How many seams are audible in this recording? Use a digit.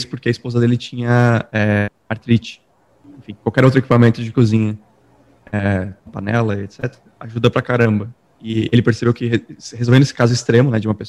1